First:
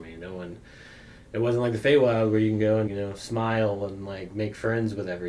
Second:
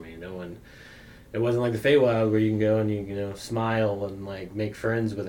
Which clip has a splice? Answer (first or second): first